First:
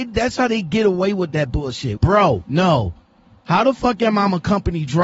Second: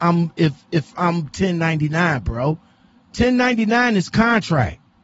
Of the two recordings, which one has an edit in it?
first; 1 cut; at 2.0 s

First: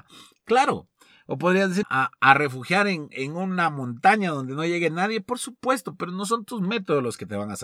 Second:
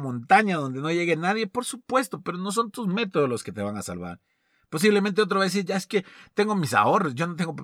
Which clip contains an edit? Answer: first; 1 cut; at 1.8 s

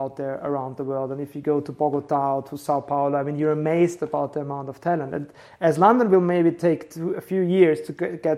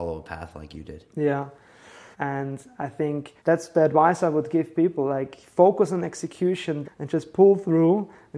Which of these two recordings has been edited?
second; 3 cuts; at 2.1 s, 3.4 s, 6.8 s

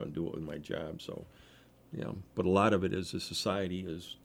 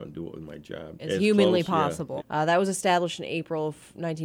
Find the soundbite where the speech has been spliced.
second; 2 cuts; at 1.0 s, 2.2 s

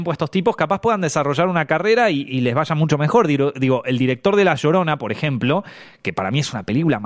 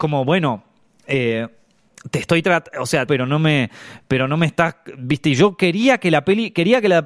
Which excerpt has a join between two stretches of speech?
second; 1 cut; at 3.1 s

